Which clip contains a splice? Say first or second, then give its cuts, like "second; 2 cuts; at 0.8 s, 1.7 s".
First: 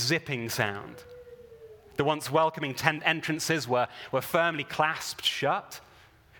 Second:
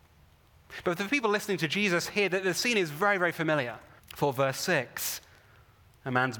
second; 1 cut; at 4.0 s